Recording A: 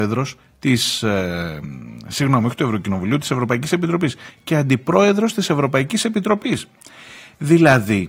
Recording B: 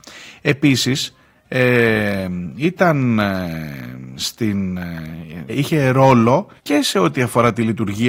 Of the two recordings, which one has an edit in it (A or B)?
B